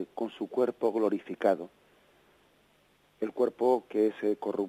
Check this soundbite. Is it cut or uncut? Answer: cut